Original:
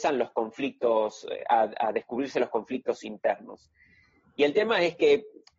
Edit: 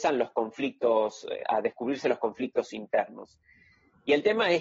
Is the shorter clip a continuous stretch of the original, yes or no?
no